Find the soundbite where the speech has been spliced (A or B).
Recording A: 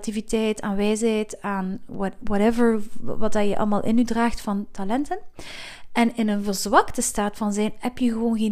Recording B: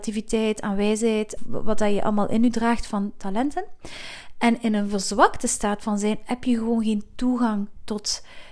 B